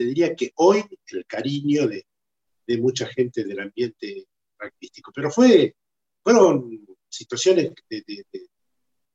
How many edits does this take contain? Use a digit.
0